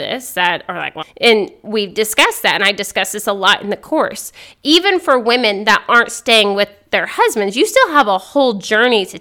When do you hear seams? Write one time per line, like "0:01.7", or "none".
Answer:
0:01.0